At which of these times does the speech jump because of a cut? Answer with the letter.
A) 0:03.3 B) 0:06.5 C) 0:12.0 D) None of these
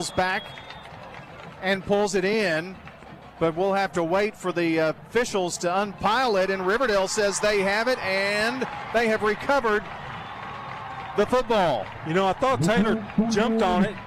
D